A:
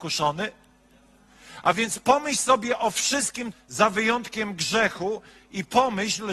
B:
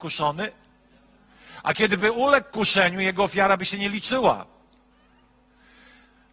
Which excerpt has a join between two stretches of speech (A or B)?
A